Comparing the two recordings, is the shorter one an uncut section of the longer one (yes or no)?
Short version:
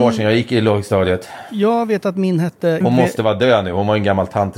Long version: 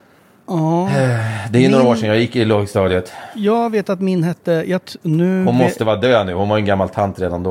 no